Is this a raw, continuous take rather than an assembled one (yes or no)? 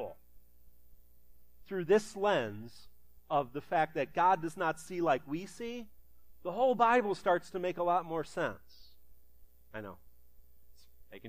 no